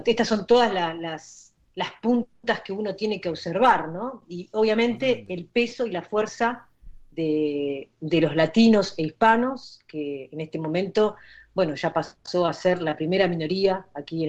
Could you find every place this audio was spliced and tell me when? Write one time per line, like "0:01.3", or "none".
none